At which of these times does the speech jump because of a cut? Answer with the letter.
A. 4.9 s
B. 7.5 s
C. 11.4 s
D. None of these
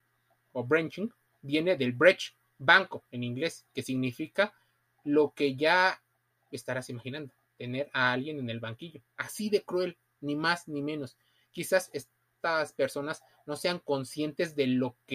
D